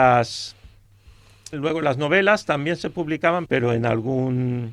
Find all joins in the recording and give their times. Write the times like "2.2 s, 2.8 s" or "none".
1.5 s, 3.5 s

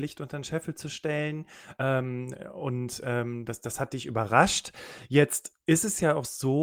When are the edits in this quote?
none

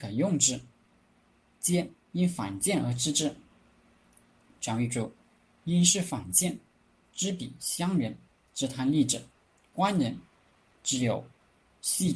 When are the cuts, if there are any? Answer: none

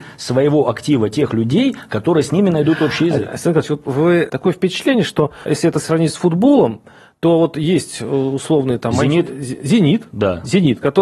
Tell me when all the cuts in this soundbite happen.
none

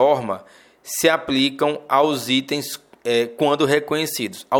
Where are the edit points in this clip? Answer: none

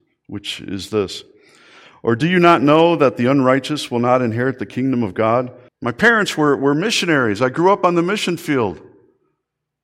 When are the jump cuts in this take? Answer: 5.7 s

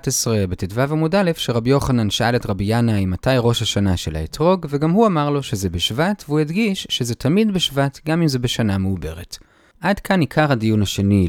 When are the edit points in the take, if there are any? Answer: none

